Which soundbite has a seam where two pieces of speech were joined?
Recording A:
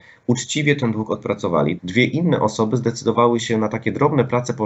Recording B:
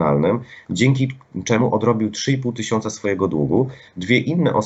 A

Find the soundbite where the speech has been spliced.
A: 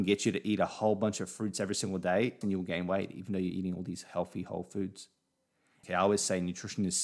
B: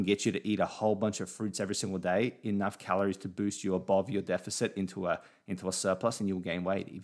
A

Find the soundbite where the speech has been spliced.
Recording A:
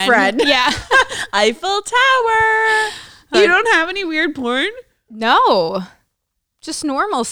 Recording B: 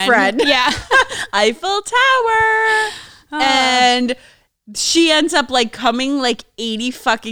A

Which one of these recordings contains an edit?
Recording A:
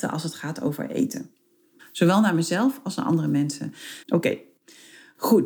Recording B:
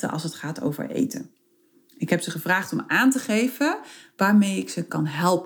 A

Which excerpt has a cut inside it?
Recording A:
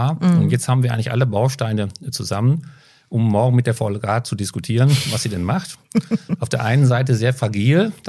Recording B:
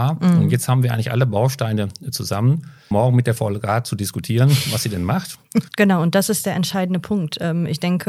B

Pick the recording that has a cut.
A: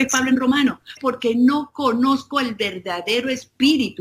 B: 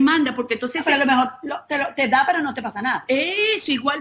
A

